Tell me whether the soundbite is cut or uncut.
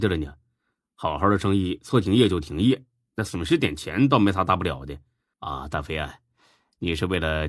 cut